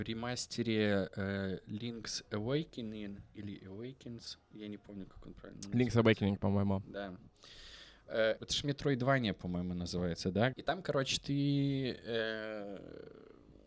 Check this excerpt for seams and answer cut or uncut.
cut